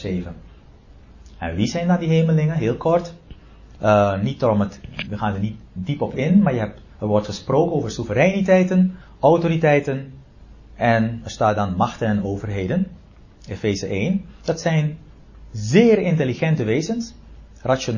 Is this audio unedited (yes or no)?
no